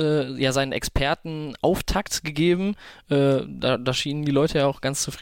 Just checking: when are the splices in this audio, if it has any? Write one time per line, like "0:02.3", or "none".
none